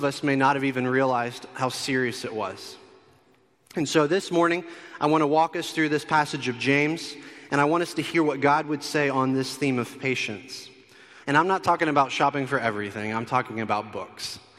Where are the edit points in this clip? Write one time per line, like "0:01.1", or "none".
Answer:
0:11.2